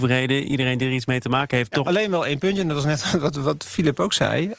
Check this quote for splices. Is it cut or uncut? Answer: cut